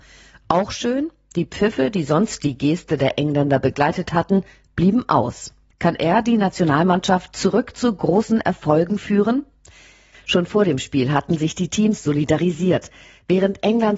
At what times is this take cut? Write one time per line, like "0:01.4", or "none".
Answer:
0:05.7
0:10.1